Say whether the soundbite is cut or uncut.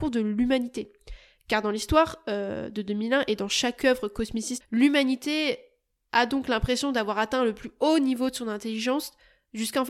cut